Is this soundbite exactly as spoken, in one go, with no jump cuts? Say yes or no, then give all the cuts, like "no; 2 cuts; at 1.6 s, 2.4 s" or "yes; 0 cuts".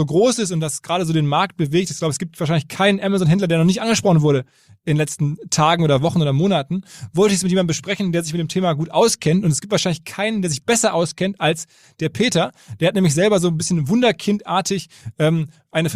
yes; 0 cuts